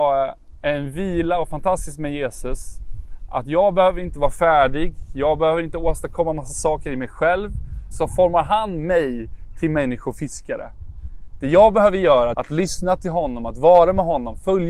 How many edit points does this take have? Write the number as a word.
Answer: two